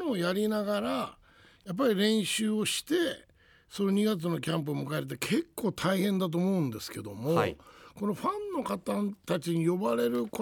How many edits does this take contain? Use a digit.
0